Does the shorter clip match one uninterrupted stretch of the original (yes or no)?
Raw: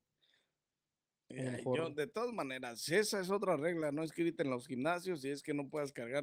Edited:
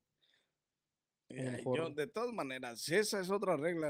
yes